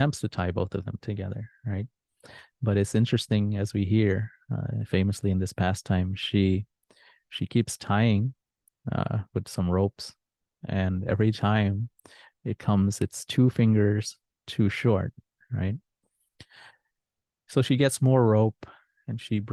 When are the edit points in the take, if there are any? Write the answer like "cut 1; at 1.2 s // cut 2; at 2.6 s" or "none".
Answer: none